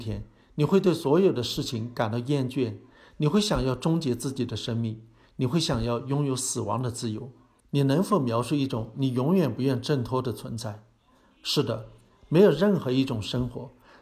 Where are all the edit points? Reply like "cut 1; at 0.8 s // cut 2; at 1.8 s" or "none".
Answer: cut 1; at 7.6 s

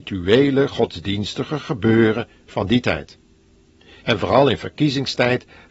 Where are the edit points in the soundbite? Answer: cut 1; at 4.0 s

